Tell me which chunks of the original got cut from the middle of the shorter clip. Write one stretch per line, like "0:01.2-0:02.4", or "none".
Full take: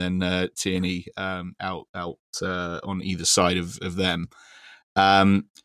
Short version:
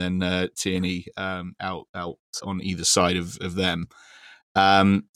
0:02.4-0:02.8